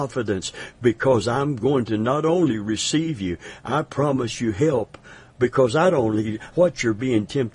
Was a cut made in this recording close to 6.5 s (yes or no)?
yes